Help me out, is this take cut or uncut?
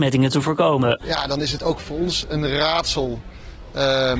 uncut